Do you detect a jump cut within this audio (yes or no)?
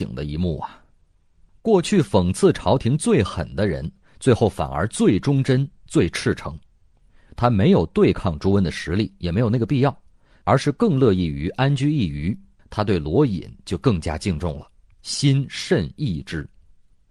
yes